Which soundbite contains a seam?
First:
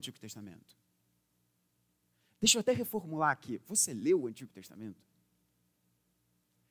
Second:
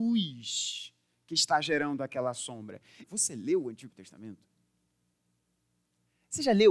second; 1 cut; at 3.0 s

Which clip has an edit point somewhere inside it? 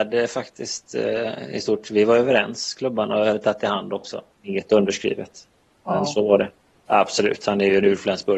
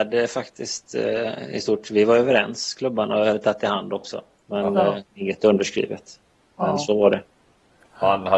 first; 2 cuts; at 4.3 s, 6.9 s

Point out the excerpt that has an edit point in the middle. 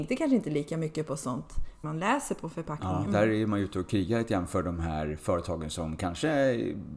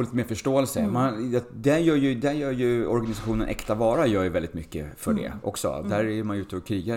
first; 2 cuts; at 1.8 s, 3.1 s

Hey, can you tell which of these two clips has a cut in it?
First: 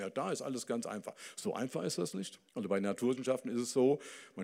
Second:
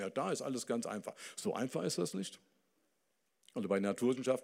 first; 1 cut; at 2.5 s

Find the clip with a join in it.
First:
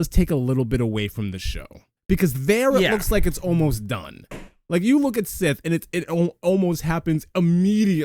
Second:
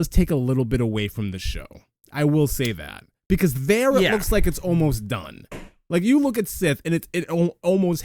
first; 1 cut; at 2.0 s

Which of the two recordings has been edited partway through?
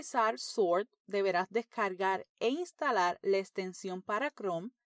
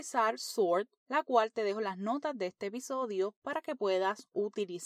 second; 1 cut; at 1.0 s

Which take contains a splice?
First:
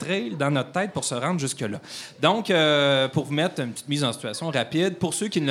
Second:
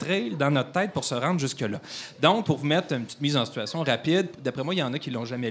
second; 2 cuts; at 2.4 s, 4.3 s

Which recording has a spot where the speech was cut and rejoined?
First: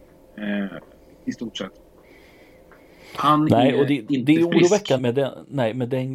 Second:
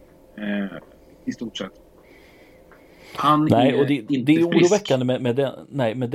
first; 1 cut; at 5.0 s

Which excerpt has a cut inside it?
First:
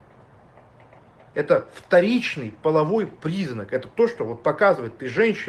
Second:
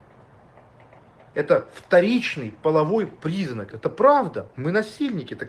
second; 1 cut; at 3.7 s

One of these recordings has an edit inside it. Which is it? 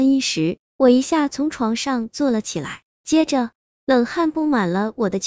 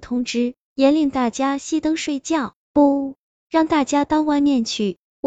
second; 1 cut; at 2.6 s

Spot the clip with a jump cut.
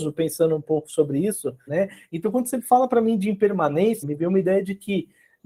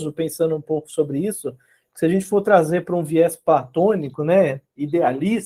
first; 2 cuts; at 1.7 s, 4.0 s

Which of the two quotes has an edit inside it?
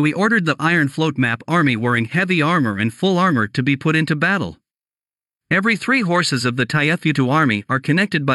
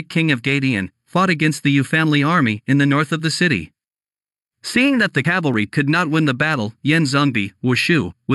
second; 1 cut; at 4.4 s

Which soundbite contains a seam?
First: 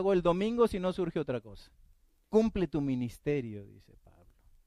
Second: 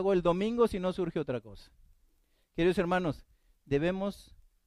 first; 1 cut; at 2.3 s

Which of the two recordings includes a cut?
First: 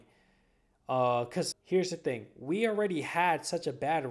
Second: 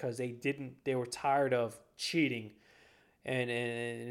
first; 1 cut; at 1.5 s

